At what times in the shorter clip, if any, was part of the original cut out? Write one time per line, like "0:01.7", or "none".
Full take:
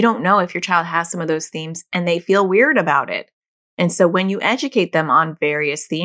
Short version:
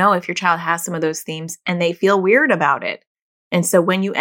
none